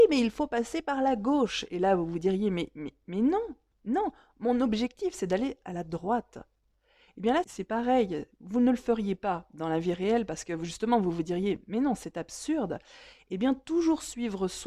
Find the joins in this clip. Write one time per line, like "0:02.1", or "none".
0:07.4